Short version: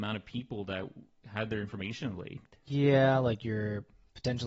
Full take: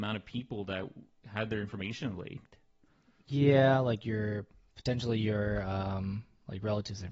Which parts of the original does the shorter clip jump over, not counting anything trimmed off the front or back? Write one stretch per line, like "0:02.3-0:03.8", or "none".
0:02.6-0:03.2